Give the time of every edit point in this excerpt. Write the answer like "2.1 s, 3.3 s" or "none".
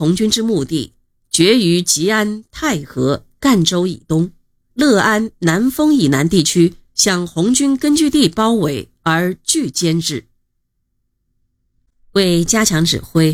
4.7 s